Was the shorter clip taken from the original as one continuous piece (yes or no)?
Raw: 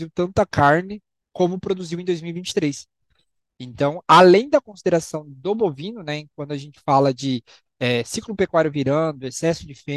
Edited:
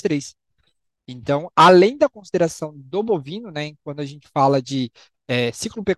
yes